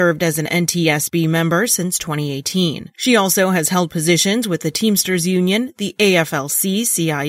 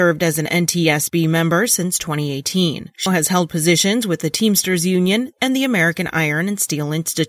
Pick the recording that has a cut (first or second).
second